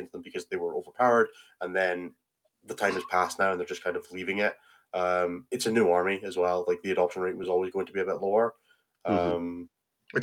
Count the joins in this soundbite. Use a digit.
0